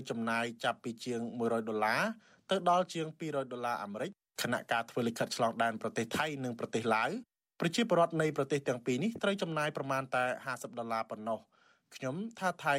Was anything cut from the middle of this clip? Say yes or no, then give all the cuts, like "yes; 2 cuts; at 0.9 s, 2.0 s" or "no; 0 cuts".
no; 0 cuts